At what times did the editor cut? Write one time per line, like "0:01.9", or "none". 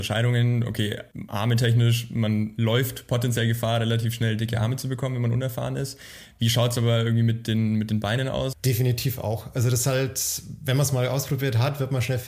0:08.5